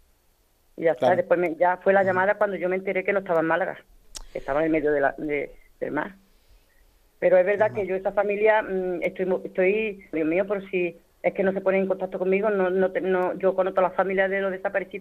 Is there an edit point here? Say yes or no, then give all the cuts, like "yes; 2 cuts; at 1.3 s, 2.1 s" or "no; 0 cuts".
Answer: yes; 1 cut; at 10.1 s